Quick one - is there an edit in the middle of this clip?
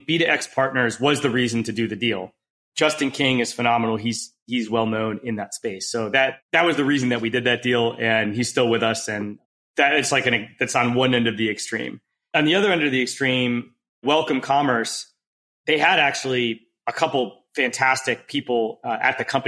no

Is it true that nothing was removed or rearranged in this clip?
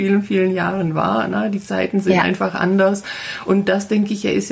yes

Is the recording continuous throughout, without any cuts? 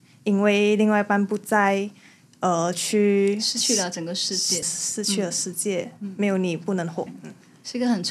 no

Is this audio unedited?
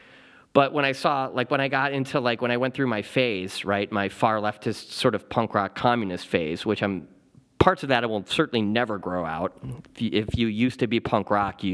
yes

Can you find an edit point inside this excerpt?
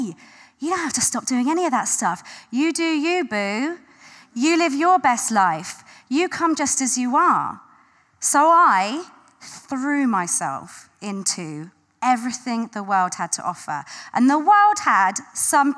no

